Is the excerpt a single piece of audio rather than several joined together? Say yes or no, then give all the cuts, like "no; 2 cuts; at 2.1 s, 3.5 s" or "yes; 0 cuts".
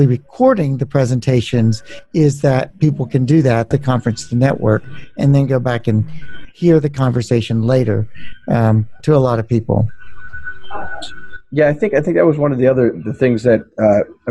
no; 2 cuts; at 3.7 s, 9.0 s